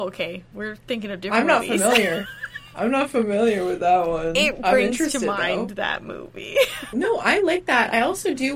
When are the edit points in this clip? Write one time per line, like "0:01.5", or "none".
0:06.9